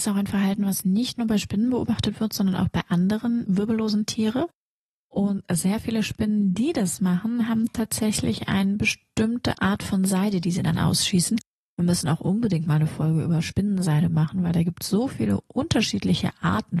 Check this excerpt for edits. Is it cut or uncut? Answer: uncut